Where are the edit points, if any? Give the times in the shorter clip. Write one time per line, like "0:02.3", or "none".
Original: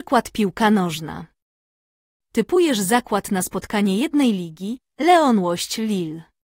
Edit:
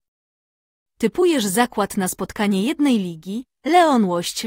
none